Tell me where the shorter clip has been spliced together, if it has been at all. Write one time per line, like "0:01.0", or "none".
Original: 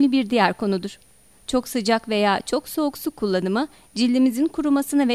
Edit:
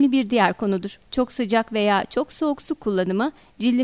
0:01.0